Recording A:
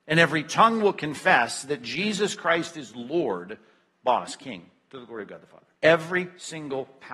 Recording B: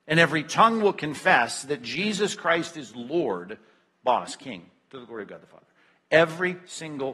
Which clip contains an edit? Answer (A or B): A